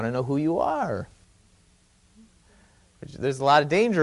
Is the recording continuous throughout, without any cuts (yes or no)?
yes